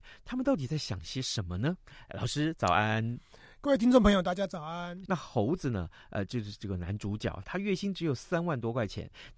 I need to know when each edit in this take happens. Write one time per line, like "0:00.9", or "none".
0:05.1
0:07.4